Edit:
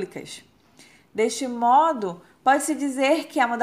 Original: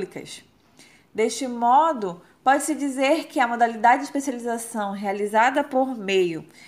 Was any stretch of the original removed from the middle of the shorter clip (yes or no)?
no